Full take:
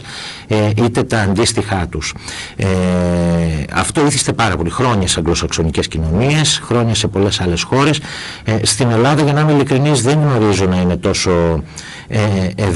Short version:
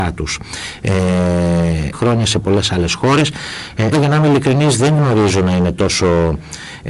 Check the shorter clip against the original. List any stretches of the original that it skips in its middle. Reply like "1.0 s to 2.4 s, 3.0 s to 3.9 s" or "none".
3.7 s to 6.6 s, 8.6 s to 9.2 s